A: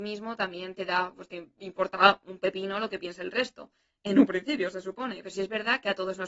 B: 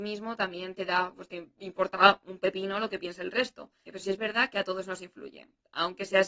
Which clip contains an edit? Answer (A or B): B